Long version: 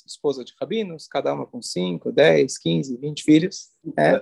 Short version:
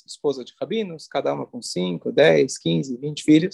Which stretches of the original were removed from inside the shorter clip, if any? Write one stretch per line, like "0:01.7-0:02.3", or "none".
none

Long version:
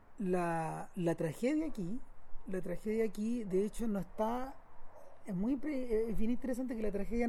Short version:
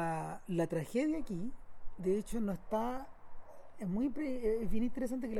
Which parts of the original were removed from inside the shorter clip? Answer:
0:02.5-0:03.5

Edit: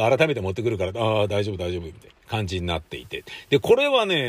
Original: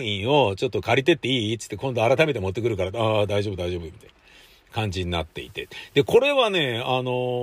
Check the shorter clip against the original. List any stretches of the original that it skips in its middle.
0:04.2-0:04.6

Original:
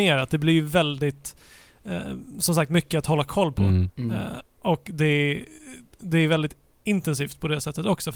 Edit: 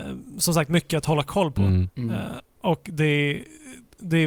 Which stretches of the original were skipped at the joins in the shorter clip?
none

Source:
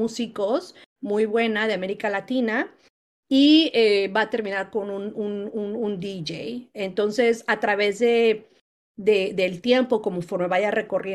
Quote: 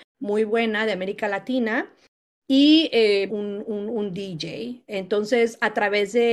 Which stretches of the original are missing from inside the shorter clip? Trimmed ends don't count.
0:04.1-0:05.1

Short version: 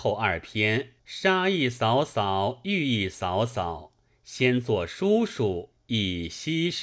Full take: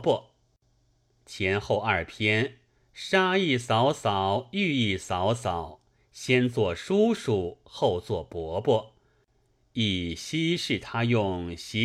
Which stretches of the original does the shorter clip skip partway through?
0:02.6-0:02.9
0:07.6-0:09.6

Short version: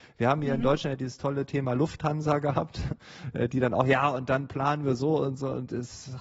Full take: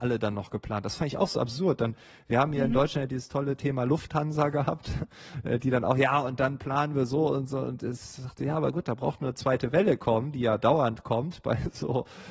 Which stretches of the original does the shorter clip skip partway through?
none

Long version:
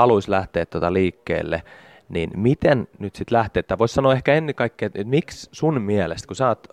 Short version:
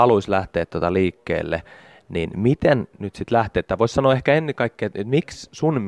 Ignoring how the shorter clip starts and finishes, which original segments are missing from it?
none

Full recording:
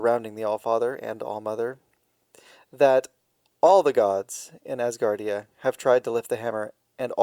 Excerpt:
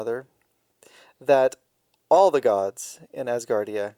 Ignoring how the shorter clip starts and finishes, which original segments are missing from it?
none

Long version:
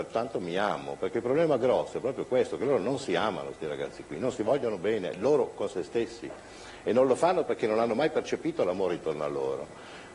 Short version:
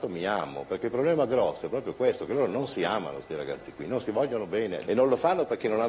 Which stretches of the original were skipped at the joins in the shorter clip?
0:05.2-0:06.8

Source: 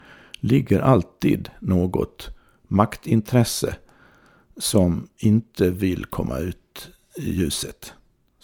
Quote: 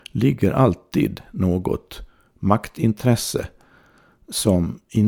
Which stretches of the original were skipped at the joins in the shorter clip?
none

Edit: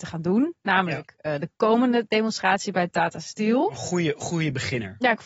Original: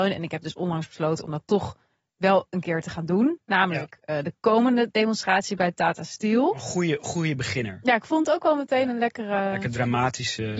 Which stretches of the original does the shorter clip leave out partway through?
none

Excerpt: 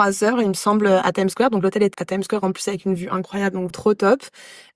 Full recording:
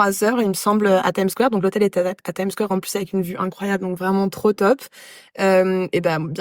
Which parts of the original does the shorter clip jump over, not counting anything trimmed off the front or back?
0:01.9-0:02.2
0:04.0-0:04.3

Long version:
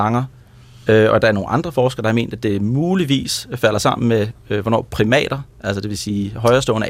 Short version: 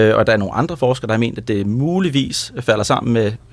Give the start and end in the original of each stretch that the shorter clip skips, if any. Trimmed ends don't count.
none

